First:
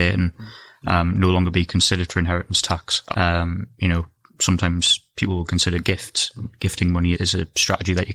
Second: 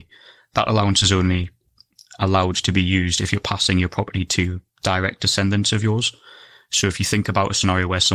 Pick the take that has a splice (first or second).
first